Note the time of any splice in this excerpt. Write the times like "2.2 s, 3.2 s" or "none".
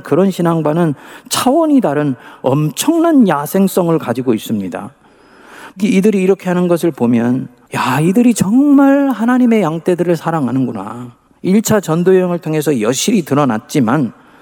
5.7 s, 11.3 s